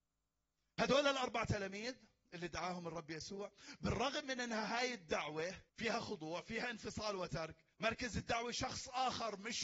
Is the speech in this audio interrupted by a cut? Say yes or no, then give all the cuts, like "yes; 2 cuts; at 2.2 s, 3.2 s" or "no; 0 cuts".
yes; 2 cuts; at 5.7 s, 7.7 s